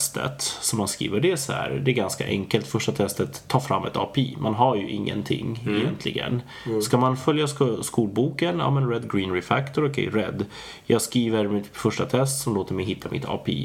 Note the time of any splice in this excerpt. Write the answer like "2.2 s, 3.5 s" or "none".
none